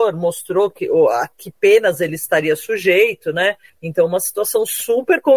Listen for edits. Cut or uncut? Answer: cut